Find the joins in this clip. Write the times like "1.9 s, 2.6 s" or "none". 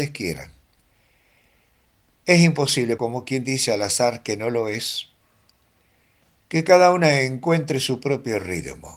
3.0 s